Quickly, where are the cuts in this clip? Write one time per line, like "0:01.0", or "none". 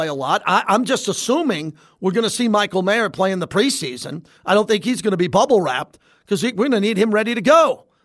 none